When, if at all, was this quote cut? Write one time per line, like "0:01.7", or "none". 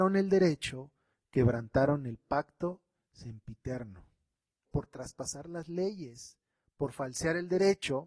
0:04.7